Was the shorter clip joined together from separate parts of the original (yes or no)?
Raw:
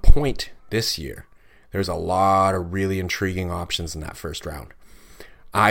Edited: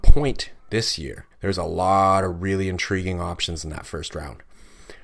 yes